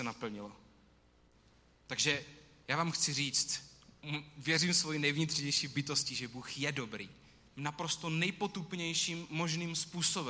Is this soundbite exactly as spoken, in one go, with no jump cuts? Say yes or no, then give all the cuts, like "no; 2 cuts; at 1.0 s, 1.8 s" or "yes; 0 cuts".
no; 1 cut; at 7.5 s